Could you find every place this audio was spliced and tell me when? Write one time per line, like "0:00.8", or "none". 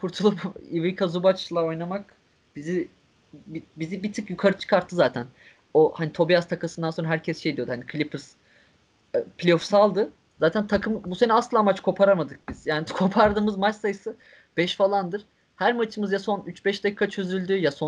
0:10.4